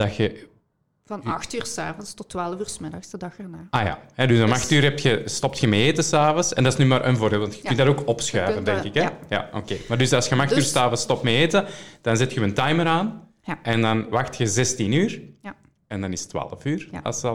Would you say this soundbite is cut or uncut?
uncut